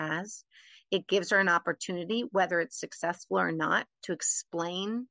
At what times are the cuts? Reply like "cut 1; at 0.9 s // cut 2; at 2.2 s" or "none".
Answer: none

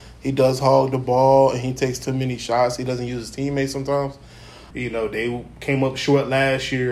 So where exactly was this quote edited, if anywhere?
cut 1; at 4.7 s

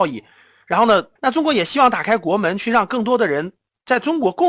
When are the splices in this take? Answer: cut 1; at 1.2 s

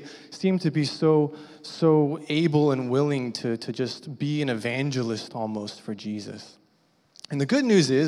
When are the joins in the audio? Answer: none

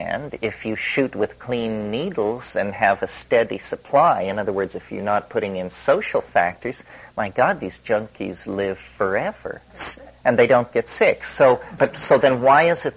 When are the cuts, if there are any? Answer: cut 1; at 9.7 s // cut 2; at 11.8 s

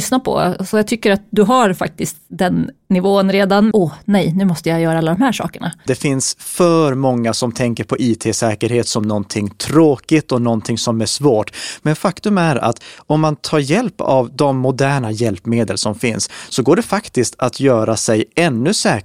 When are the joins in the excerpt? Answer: cut 1; at 3.7 s // cut 2; at 5.9 s

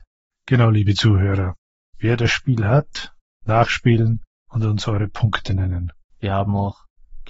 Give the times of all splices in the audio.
cut 1; at 6.2 s

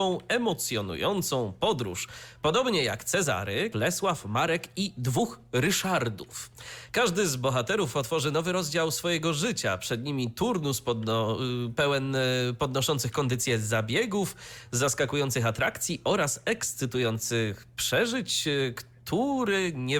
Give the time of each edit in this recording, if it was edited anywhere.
cut 1; at 3.7 s // cut 2; at 6.9 s // cut 3; at 11.8 s

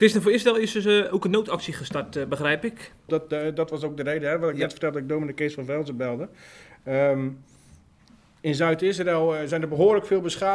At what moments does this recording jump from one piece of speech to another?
cut 1; at 3.1 s

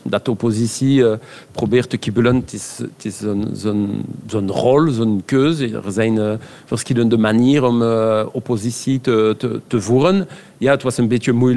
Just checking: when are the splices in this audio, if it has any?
none

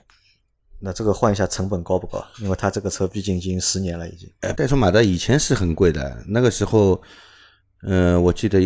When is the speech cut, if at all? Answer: cut 1; at 4.5 s

